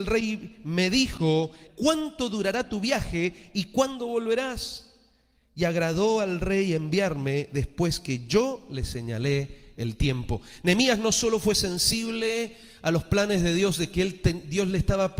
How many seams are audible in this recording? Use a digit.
1